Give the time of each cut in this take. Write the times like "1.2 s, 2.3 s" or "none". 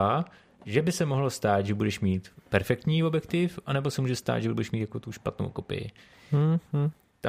none